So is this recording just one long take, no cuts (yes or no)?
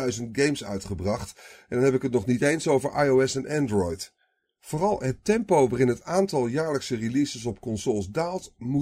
yes